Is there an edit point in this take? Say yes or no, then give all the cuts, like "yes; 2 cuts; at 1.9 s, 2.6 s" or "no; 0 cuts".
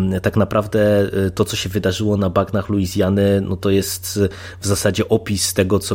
no; 0 cuts